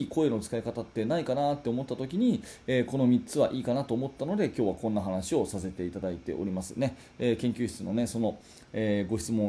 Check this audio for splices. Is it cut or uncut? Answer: uncut